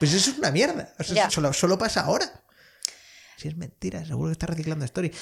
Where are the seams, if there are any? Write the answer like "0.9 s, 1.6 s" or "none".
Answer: 1.3 s, 3.4 s